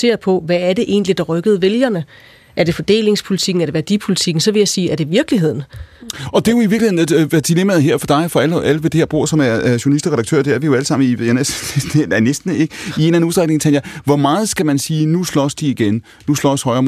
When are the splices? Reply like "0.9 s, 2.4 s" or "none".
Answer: none